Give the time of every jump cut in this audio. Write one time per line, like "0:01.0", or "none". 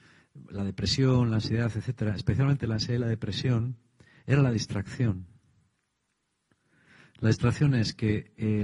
none